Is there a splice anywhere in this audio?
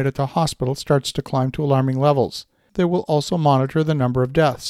no; 0 cuts

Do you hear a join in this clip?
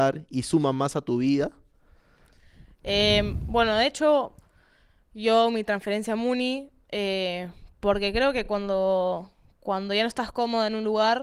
no; 0 cuts

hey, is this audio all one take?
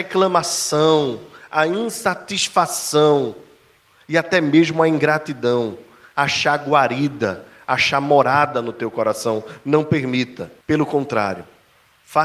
no; 1 cut; at 10.6 s

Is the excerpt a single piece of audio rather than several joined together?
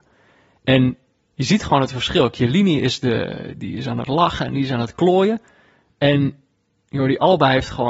yes; 0 cuts

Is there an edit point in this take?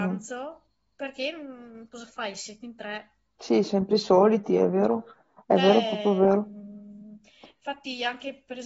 no; 0 cuts

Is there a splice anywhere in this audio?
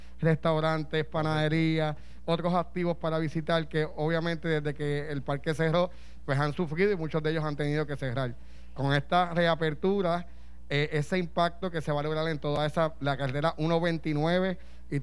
no; 0 cuts

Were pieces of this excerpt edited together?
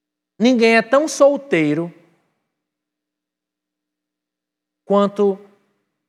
no; 0 cuts

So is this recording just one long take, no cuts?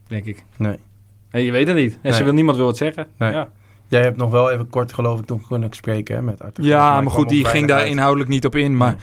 yes; 0 cuts

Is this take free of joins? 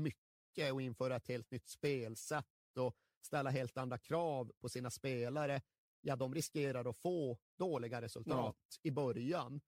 yes; 0 cuts

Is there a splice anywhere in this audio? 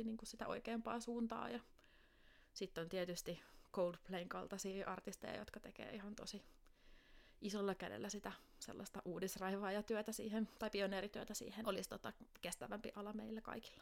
yes; 1 cut; at 11.6 s

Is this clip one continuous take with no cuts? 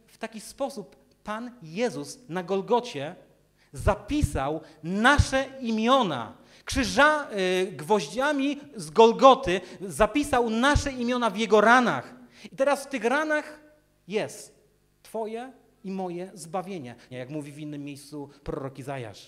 no; 2 cuts; at 12.5 s, 17.1 s

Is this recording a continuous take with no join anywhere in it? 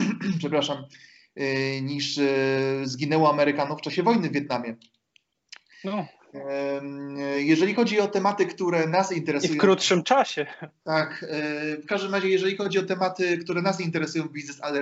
yes; 0 cuts

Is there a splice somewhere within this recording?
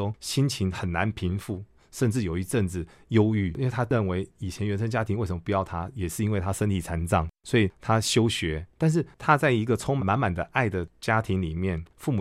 yes; 1 cut; at 10.0 s

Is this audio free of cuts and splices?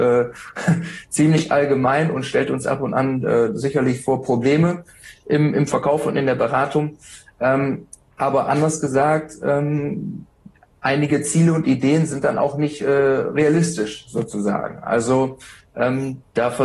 yes; 0 cuts

